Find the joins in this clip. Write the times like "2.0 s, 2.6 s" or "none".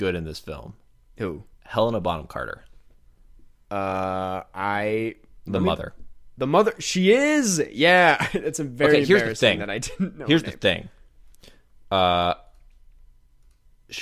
1.5 s

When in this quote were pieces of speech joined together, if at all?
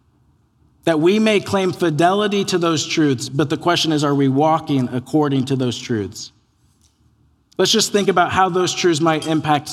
none

